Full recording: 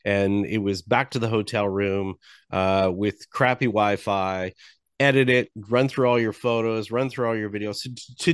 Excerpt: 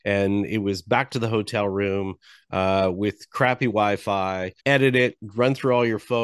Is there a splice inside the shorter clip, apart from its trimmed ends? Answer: yes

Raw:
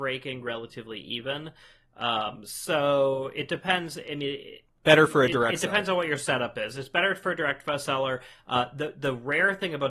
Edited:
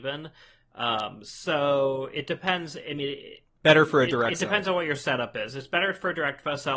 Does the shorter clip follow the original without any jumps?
yes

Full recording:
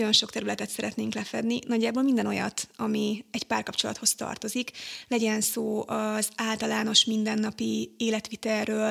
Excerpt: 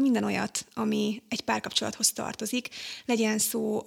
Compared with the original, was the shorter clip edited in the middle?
no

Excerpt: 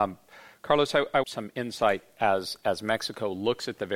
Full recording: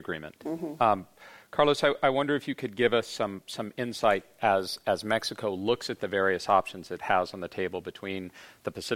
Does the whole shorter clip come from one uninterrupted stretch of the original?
no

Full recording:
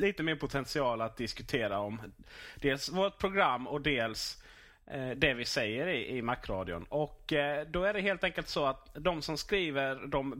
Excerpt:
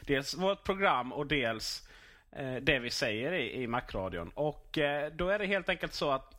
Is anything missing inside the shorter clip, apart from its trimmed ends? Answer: no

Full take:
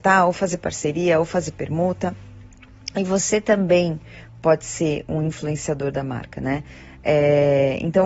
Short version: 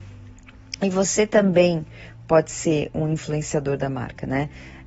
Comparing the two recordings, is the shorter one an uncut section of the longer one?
yes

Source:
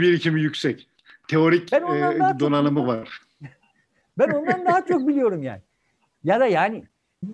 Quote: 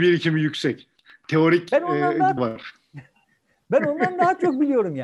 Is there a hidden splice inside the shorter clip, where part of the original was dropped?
yes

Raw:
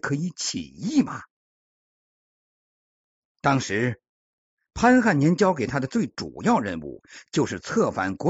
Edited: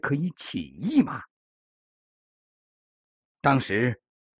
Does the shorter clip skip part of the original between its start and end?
no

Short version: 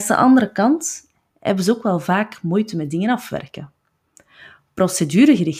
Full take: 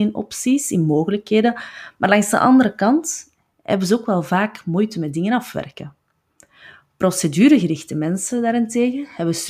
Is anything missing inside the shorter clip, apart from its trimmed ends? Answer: no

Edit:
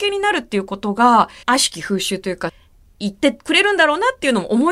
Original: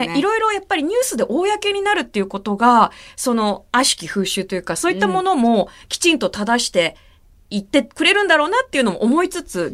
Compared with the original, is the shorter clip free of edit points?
no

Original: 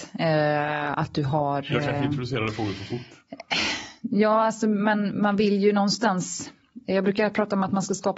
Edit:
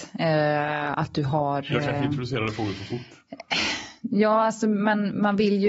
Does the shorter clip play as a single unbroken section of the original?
yes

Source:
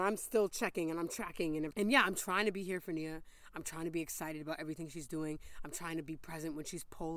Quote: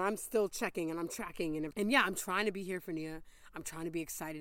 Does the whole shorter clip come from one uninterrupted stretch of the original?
yes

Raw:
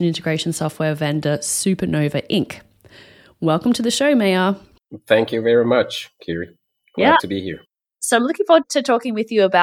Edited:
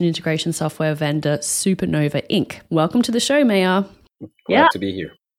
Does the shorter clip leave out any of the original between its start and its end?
yes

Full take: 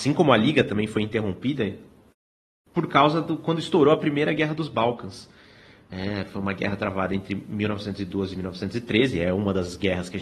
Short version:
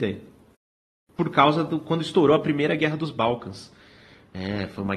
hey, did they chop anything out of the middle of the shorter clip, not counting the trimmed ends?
no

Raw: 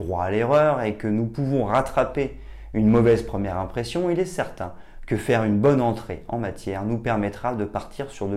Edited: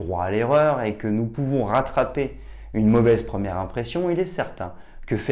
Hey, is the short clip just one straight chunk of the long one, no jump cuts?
yes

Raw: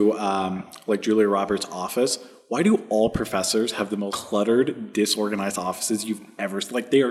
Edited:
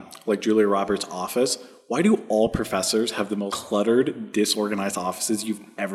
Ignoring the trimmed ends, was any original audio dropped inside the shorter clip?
no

